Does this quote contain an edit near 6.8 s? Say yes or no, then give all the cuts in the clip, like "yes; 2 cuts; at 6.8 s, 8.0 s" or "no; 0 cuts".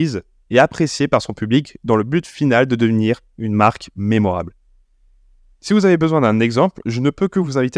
no; 0 cuts